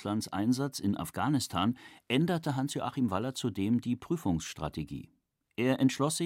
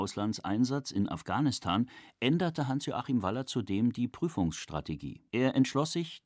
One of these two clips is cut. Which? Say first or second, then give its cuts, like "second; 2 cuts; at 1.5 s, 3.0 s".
second; 1 cut; at 5.3 s